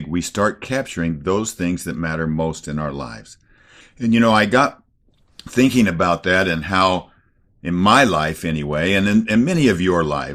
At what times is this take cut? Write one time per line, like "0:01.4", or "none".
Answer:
0:03.8

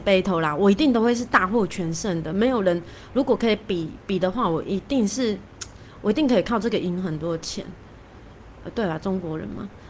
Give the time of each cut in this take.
none

